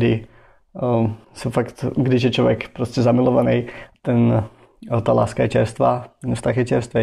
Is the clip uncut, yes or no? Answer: no